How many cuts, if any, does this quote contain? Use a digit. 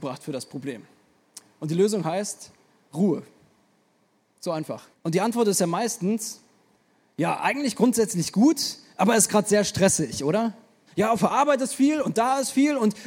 2